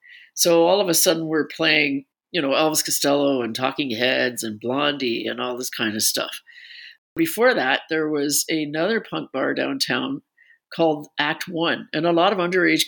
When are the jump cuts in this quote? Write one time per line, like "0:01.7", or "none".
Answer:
none

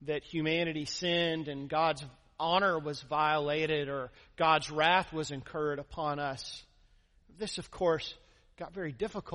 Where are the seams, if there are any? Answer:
0:07.2

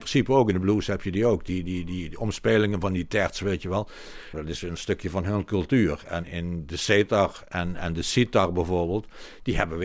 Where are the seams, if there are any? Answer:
0:04.3

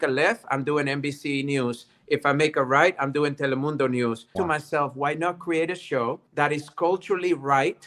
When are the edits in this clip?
0:04.4
0:06.3

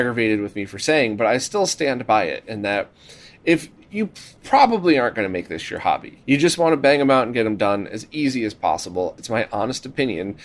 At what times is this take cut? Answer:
0:06.2
0:09.2

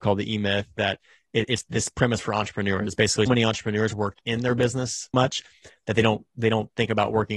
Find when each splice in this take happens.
0:03.3
0:05.1

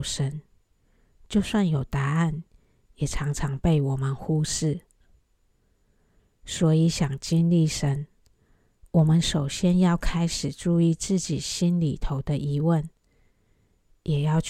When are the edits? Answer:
none

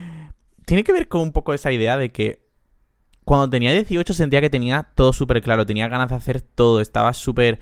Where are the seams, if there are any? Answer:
none

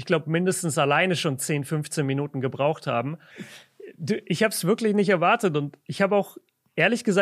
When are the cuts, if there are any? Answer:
0:03.3

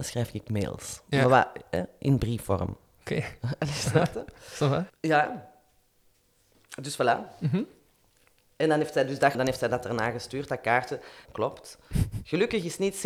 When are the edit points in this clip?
0:04.9
0:09.3
0:11.2

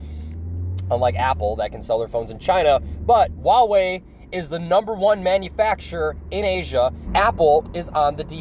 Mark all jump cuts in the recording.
0:03.4
0:07.1

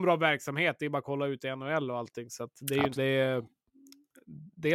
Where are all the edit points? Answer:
0:03.0

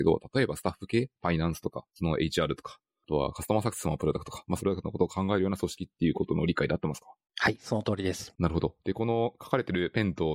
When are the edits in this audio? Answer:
0:04.6
0:08.3

